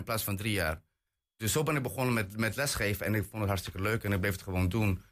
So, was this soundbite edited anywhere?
no; 0 cuts

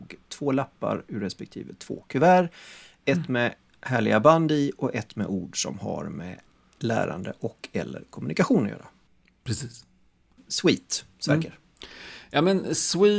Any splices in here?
no; 0 cuts

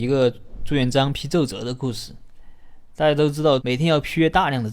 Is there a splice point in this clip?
yes; 1 cut; at 3.6 s

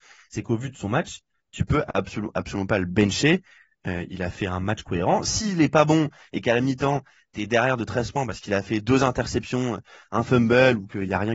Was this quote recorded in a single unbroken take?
yes; 0 cuts

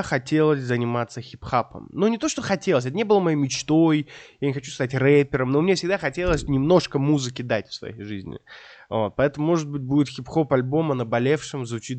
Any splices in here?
no; 0 cuts

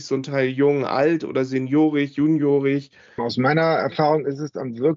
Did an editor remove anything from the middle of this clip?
yes; 1 cut; at 3.2 s

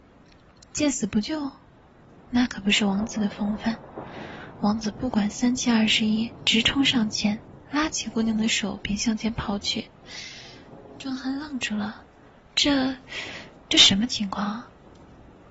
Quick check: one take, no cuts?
no; 1 cut; at 13.6 s

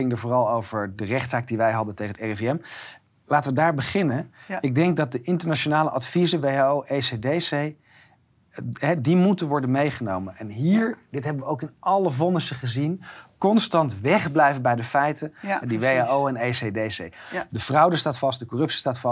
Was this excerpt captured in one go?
no; 2 cuts; at 15.6 s, 17.5 s

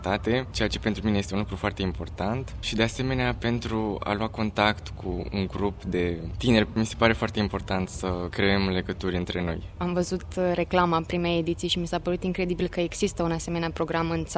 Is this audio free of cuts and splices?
yes; 0 cuts

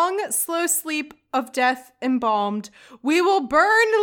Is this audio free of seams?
yes; 0 cuts

